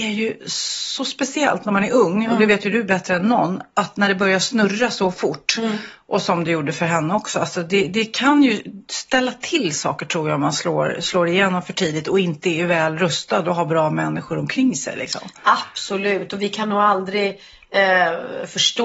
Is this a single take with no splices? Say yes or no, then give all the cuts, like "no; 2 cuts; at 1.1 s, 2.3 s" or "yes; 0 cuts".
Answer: yes; 0 cuts